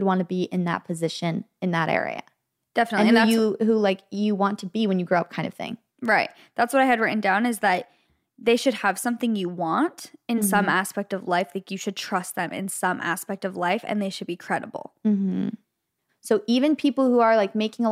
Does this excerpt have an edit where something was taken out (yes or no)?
yes